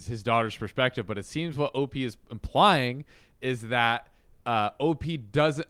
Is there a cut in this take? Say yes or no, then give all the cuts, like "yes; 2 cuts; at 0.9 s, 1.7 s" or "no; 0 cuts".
no; 0 cuts